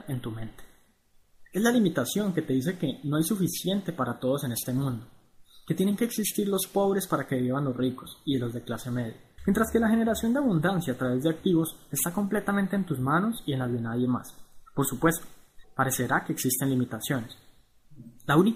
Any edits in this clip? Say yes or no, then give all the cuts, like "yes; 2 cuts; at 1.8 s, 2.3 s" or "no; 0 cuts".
yes; 2 cuts; at 9.4 s, 15.6 s